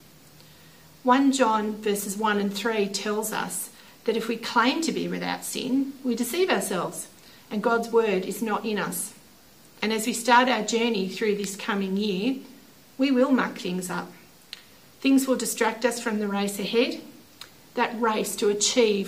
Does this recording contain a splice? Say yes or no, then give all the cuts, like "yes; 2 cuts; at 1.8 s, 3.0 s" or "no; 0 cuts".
yes; 1 cut; at 9.8 s